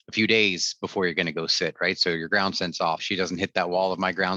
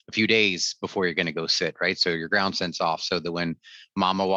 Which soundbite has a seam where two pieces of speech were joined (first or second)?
first